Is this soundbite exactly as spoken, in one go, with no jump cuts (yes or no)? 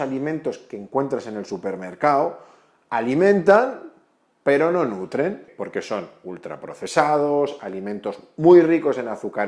yes